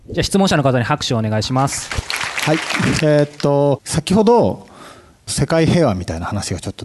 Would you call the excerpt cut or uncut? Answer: cut